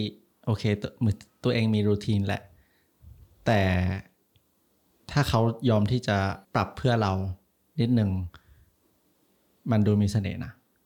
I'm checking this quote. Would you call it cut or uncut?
cut